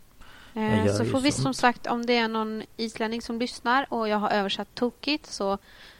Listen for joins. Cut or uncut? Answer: cut